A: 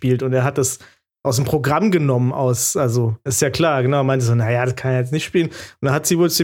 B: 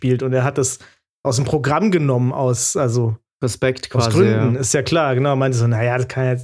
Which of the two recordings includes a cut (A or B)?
A